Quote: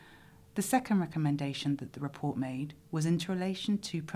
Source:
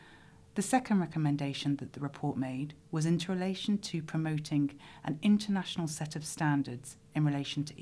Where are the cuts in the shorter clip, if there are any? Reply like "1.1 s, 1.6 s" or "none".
none